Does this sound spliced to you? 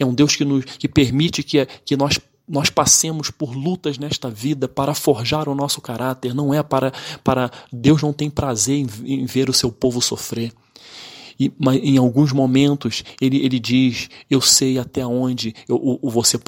no; 0 cuts

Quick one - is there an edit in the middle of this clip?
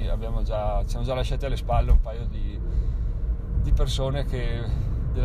no; 0 cuts

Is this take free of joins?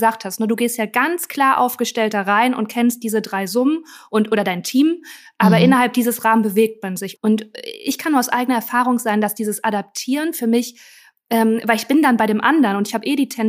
no; 1 cut; at 7.1 s

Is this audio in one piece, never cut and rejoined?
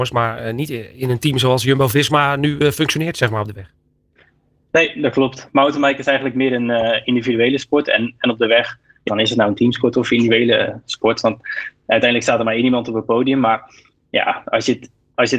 no; 1 cut; at 9.1 s

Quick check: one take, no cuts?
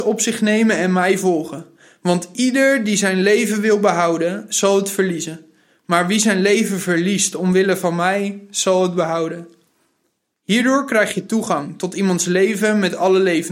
no; 1 cut; at 10.3 s

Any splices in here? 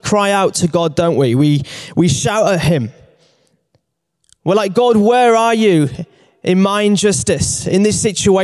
no; 0 cuts

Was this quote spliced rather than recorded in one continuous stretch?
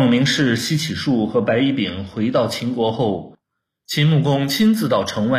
no; 0 cuts

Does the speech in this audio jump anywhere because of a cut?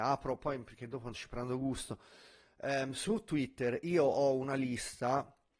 yes; 1 cut; at 1.1 s

